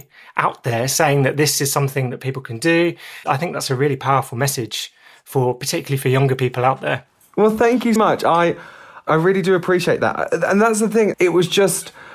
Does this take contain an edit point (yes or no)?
yes